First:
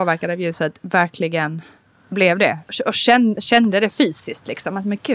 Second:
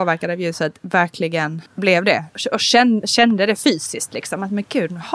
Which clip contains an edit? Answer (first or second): second